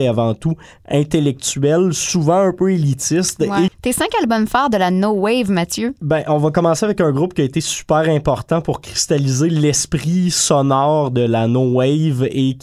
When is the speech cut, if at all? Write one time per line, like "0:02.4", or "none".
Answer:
0:03.7